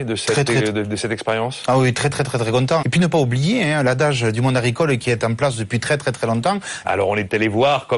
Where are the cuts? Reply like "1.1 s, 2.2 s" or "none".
2.8 s, 6.8 s